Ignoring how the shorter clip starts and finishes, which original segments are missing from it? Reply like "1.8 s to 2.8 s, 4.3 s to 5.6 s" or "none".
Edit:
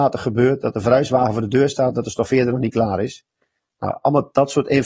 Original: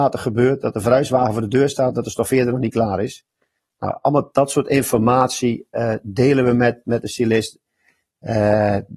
none

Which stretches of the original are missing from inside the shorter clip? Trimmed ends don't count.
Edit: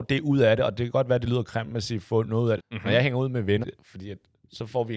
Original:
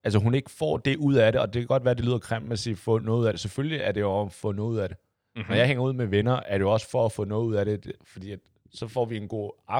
3.3 s to 5.2 s, 6.2 s to 7.8 s

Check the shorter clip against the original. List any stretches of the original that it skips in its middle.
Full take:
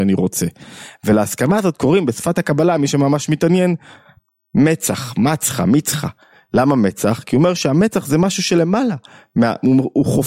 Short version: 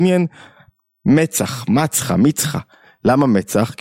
none

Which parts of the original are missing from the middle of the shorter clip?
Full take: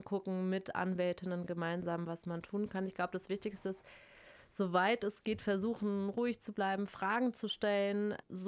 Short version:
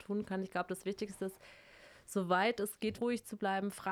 5.4 s to 6.1 s

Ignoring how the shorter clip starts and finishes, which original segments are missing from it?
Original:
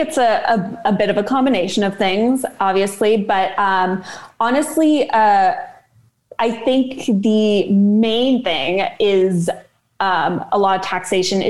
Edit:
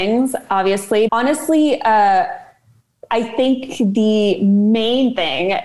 3.2 s to 4.4 s

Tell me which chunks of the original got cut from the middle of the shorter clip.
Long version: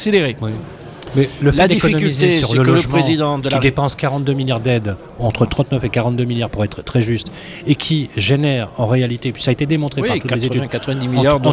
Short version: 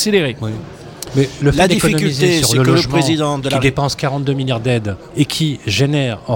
5.1 s to 7.6 s

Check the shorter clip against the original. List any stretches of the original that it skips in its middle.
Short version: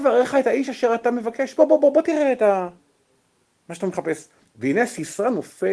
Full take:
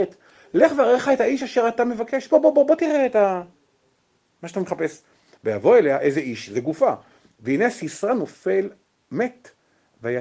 5.2 s to 7.3 s

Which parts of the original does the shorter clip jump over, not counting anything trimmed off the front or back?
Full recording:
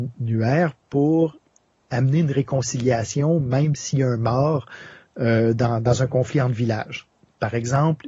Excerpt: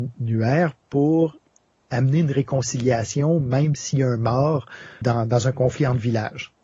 5.0 s to 5.6 s

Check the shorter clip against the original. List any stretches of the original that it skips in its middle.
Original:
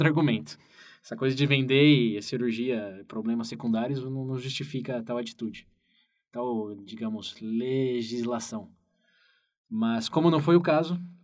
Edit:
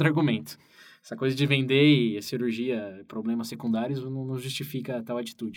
none

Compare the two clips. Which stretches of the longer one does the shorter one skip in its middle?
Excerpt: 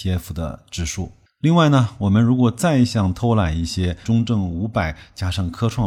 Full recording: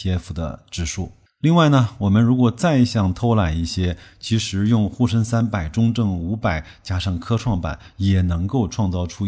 4.0 s to 5.7 s

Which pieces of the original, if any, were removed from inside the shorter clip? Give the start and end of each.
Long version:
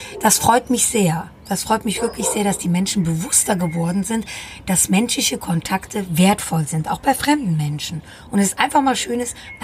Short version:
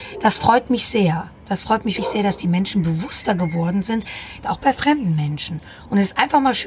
2.0 s to 2.2 s, 4.6 s to 6.8 s

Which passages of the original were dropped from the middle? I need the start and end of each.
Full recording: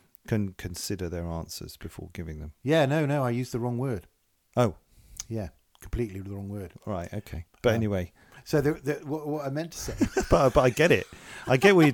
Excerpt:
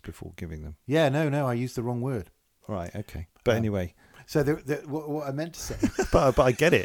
4.4 s to 6.8 s

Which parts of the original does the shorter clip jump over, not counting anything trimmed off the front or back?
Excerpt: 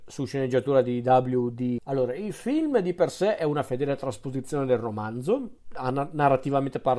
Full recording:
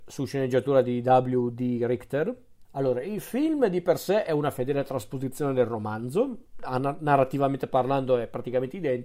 1.8 s to 2.7 s

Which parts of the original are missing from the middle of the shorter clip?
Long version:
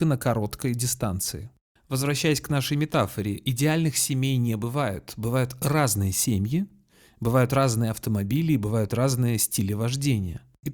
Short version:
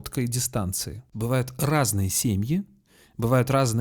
1.6 s to 5.1 s

